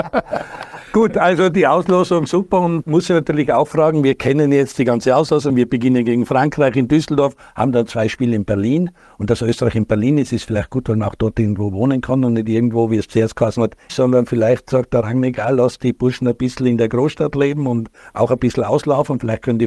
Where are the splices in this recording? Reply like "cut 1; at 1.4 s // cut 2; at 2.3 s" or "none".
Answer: cut 1; at 2.8 s // cut 2; at 5.5 s // cut 3; at 13.9 s